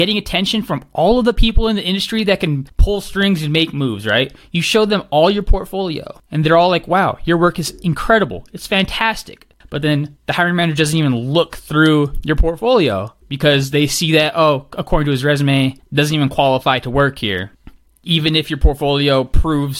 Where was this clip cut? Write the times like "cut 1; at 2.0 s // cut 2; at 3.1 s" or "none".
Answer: cut 1; at 9.6 s